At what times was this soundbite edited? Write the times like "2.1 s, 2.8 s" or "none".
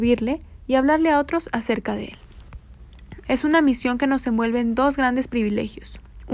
3.2 s

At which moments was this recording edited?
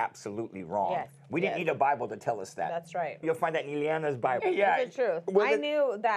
3.2 s, 4.4 s

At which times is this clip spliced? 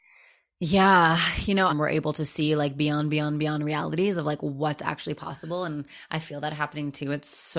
1.7 s

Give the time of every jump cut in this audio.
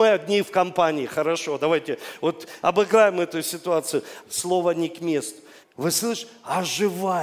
4.2 s, 5.6 s

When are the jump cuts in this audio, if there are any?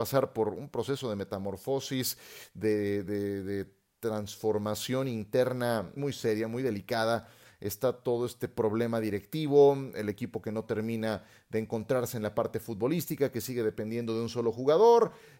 6.0 s

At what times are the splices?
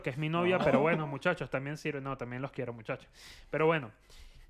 none

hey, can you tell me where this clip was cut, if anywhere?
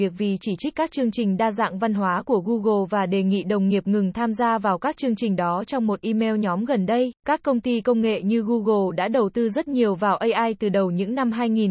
7.2 s

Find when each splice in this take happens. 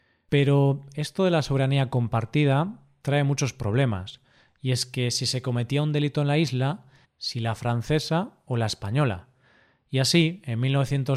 7.0 s

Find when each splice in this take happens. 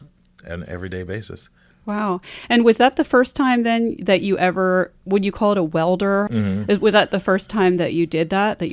6.3 s

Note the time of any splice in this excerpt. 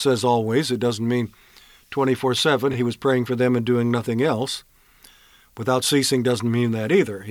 none

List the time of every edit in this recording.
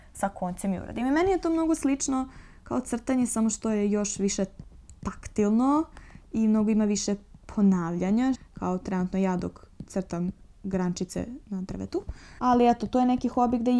8.3 s, 12.4 s

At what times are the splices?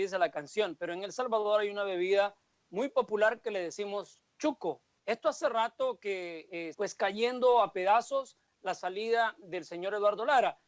5.0 s, 6.7 s

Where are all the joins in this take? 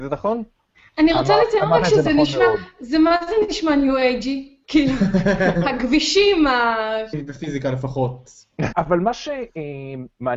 7.1 s, 8.7 s

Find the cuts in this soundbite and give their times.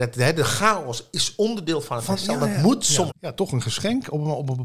3.1 s

